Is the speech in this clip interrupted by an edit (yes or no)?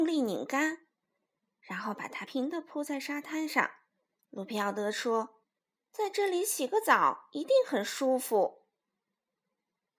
yes